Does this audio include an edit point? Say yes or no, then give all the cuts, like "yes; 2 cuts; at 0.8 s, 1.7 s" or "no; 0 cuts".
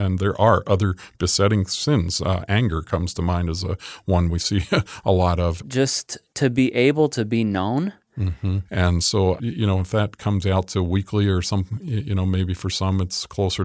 yes; 2 cuts; at 5.6 s, 8.7 s